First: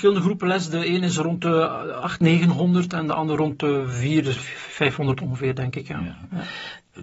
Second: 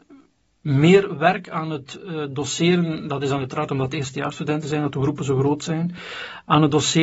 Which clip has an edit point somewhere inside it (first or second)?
first